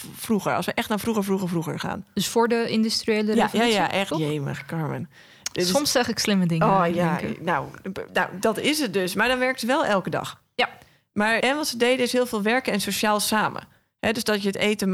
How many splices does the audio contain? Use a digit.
2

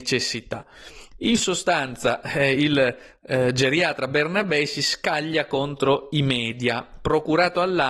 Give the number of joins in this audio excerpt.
0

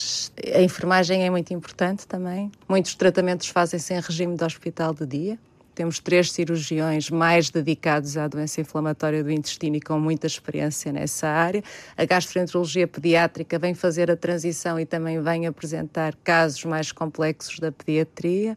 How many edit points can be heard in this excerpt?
1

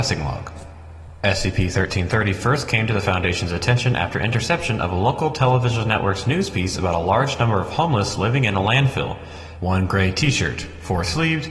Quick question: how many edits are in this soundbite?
1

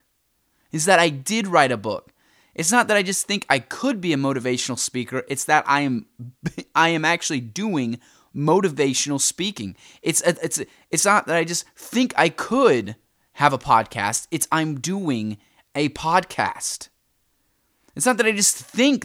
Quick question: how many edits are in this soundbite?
0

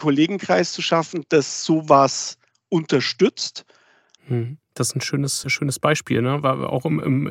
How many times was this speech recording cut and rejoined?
2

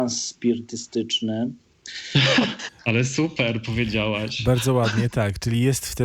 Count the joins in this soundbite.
1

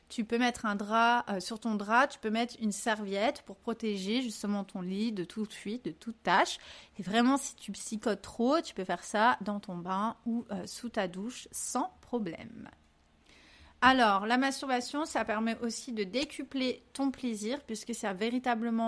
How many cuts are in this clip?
0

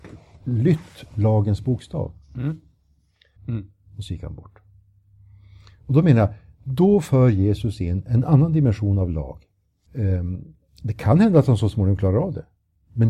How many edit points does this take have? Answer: 2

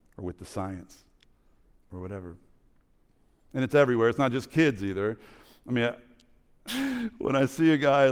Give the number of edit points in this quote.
1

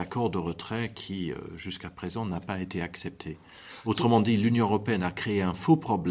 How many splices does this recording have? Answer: 0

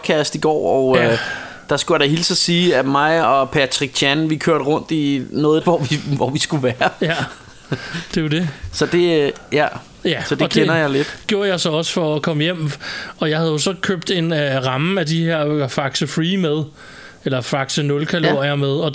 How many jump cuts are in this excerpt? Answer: 1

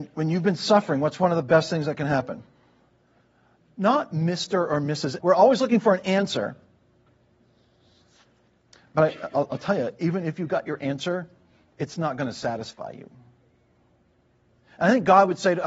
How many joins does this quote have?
1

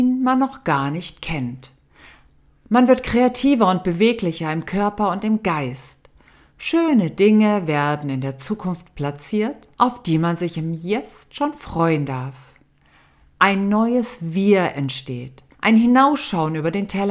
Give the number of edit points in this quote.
2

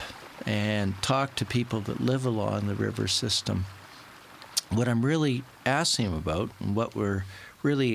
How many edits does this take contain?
1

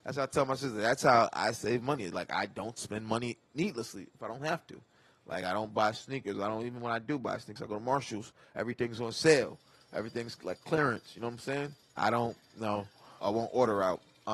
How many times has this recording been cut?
3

